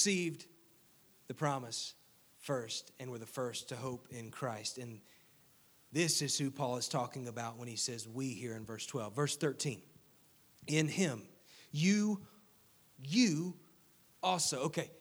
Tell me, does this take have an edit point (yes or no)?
yes